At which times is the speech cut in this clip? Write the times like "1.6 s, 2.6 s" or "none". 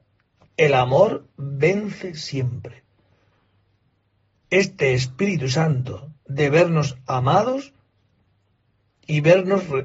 4.4 s, 6.2 s